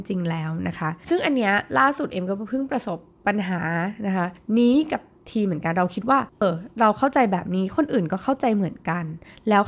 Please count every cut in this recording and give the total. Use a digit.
1